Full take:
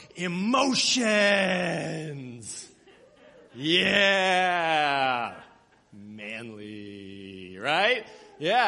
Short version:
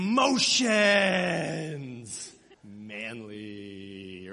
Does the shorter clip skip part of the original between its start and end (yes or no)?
yes